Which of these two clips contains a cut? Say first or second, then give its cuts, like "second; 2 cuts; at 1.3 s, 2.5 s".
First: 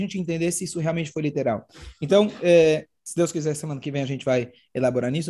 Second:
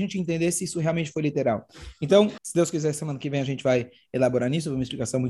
second; 1 cut; at 2.4 s